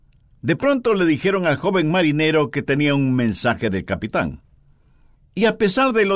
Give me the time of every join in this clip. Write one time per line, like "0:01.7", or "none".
0:05.1